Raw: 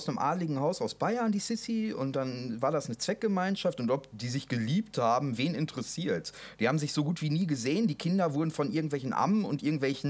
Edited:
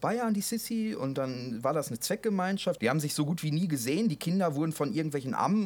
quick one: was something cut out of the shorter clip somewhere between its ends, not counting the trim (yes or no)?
yes